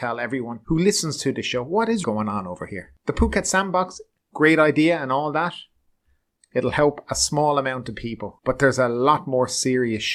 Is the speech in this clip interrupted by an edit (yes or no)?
yes